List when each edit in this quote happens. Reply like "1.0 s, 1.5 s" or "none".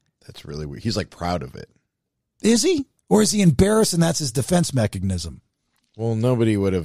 none